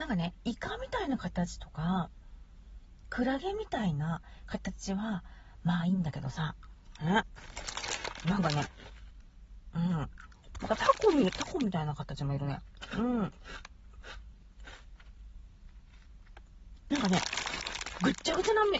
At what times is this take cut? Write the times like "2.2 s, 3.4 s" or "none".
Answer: 16.9 s